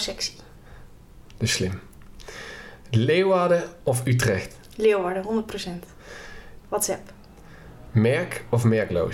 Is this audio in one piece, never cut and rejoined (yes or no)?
no